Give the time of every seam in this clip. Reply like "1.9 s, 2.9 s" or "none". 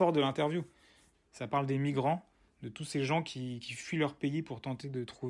1.1 s